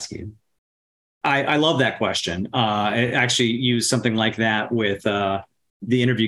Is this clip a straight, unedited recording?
yes; 0 cuts

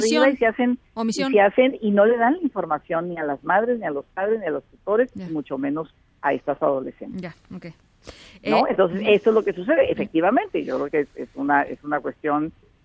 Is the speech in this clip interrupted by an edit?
no; 0 cuts

